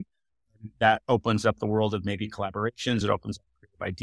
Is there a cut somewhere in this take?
yes; 1 cut; at 3.0 s

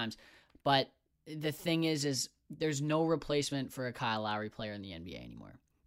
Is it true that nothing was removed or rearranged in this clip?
yes; 0 cuts

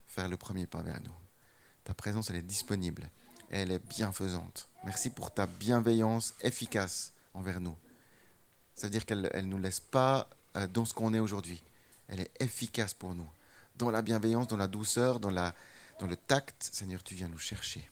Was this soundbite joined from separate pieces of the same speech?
yes; 1 cut; at 4.7 s

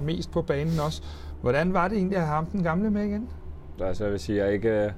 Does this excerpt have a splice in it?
yes; 1 cut; at 3.8 s

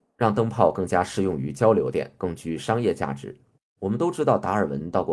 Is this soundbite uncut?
no; 1 cut; at 3.8 s

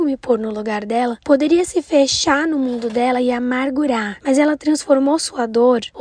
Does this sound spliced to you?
yes; 1 cut; at 4.2 s

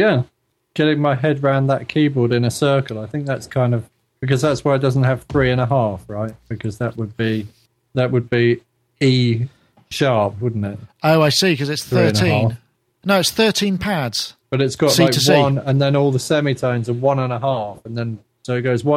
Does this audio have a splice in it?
yes; 1 cut; at 14.4 s

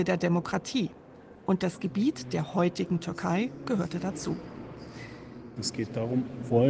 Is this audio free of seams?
no; 1 cut; at 5.6 s

